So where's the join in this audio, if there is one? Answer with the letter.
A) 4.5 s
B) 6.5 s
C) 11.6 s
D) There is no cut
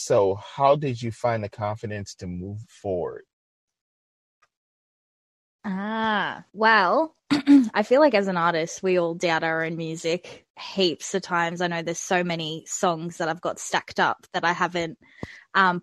B